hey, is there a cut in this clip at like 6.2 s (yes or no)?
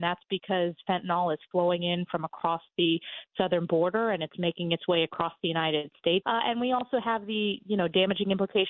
yes